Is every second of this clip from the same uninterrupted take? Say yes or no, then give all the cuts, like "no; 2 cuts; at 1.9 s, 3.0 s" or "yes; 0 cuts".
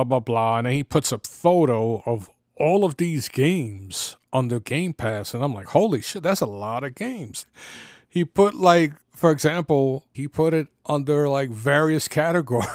no; 3 cuts; at 7.4 s, 9.0 s, 10.1 s